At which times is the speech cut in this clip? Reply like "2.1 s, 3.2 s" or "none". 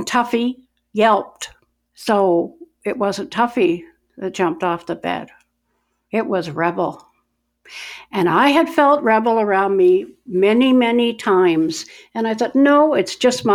none